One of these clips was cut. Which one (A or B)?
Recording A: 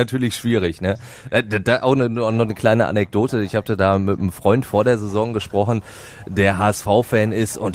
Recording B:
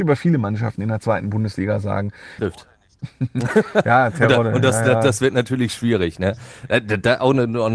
B